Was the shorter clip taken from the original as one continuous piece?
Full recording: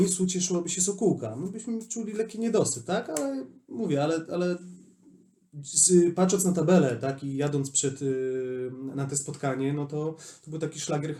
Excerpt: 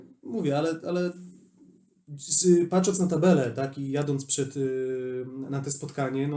yes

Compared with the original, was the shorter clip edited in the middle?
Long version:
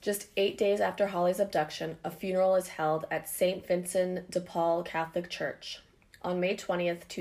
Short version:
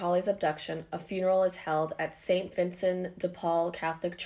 no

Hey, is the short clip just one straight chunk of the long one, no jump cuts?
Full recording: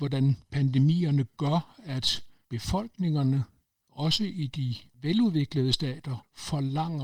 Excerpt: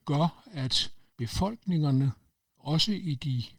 yes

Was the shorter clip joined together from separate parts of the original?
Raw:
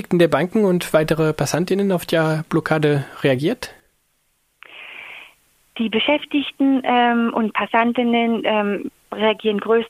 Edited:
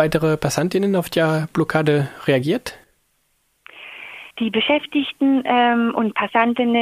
yes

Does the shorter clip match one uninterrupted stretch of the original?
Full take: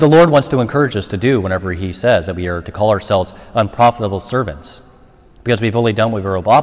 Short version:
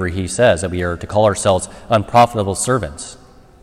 yes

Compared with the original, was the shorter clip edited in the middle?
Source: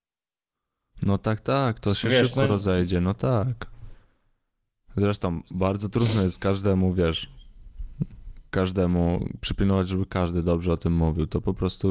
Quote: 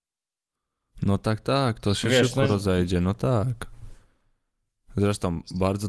no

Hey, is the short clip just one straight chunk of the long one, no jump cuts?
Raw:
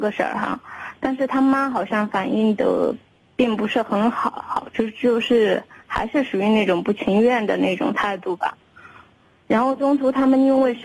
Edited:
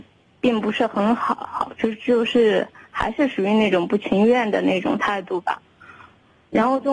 yes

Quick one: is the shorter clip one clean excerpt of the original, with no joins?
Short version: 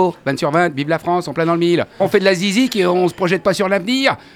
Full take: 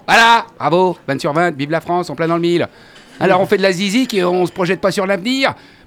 no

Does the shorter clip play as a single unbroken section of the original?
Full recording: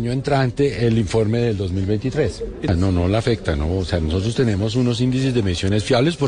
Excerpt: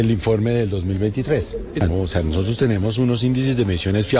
no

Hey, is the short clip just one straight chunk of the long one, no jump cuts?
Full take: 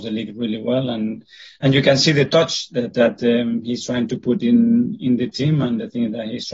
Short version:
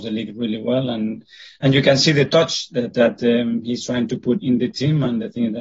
no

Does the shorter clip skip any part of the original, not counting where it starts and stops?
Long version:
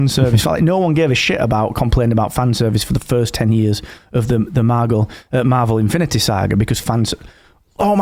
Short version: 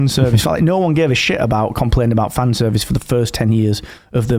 no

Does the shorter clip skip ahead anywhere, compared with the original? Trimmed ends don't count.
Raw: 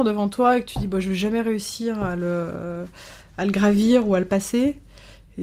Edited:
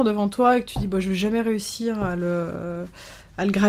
no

